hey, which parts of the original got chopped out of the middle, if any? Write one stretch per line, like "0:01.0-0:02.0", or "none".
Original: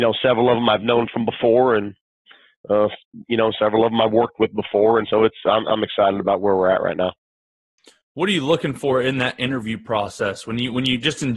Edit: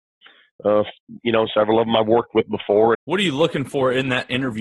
0:05.0-0:08.0